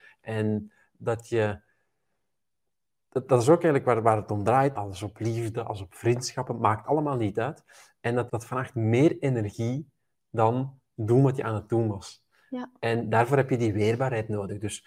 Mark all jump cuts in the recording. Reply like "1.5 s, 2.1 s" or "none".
4.8 s, 8.3 s